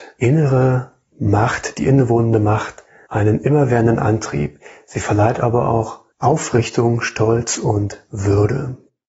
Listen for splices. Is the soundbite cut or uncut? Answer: cut